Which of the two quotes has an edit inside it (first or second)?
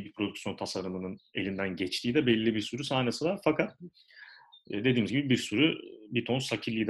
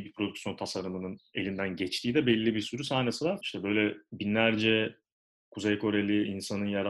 second